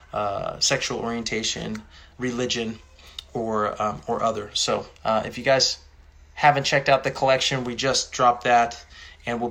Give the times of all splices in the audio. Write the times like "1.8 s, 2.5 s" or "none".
2.1 s, 4.9 s

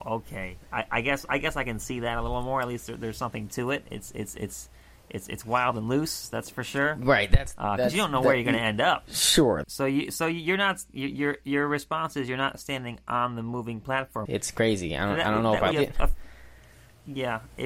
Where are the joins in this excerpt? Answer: 9.6 s, 14.3 s, 15.7 s

